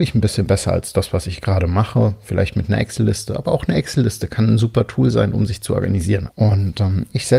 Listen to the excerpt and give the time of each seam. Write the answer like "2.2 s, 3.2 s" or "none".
6.3 s